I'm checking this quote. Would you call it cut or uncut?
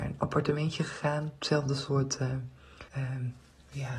cut